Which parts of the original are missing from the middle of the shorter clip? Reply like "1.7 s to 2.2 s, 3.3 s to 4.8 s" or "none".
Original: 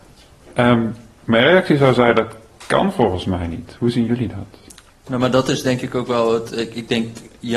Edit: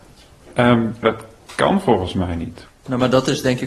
1.0 s to 2.1 s, 3.8 s to 4.9 s

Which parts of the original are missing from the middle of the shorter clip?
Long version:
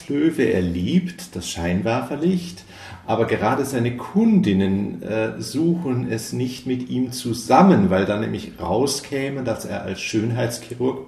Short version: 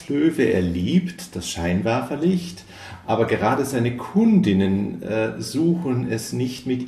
none

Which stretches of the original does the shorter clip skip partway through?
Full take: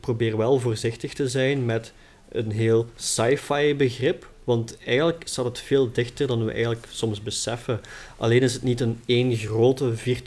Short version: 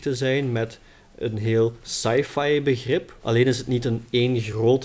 4.3 s to 8.2 s

